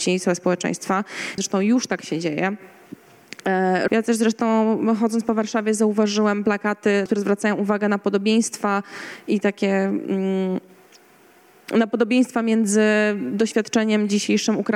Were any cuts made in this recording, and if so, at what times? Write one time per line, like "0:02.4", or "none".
0:01.4
0:03.9
0:07.1

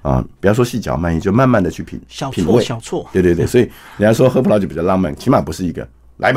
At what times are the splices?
0:05.2

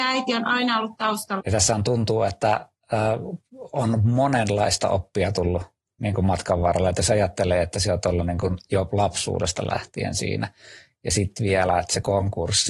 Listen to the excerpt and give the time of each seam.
0:01.4

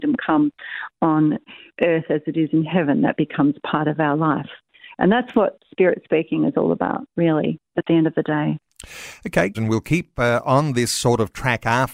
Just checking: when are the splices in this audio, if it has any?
0:09.5

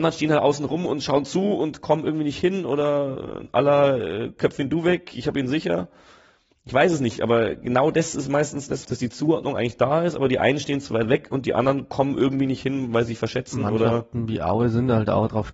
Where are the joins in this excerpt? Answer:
0:08.8

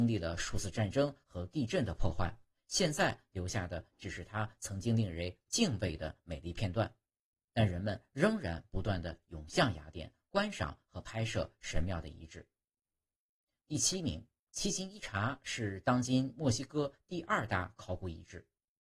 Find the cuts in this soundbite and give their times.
0:14.5

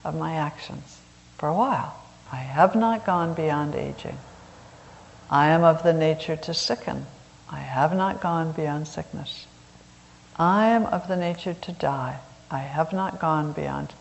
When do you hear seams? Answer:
0:02.3

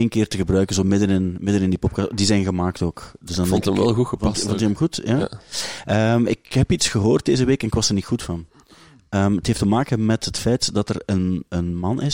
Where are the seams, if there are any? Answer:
none

